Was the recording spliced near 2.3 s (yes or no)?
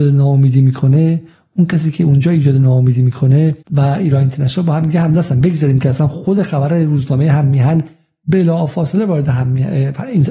no